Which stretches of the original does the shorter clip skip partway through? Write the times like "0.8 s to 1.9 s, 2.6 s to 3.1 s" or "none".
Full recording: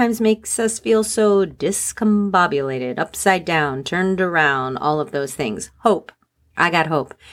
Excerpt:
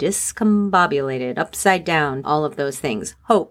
3.8 s to 4.8 s